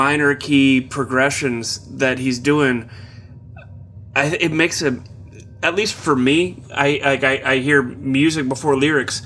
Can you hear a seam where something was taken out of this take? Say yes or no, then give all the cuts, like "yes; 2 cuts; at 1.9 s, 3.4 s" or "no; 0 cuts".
no; 0 cuts